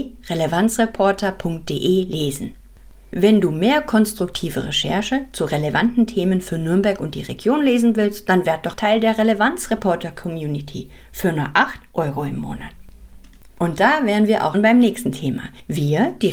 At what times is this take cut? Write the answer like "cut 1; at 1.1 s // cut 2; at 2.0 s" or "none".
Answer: cut 1; at 8.7 s // cut 2; at 14.5 s